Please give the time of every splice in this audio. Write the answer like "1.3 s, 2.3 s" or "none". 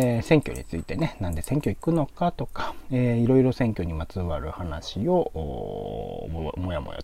none